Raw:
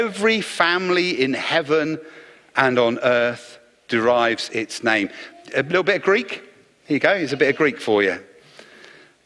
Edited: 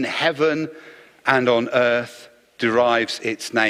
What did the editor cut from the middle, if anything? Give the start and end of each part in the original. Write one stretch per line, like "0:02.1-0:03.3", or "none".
none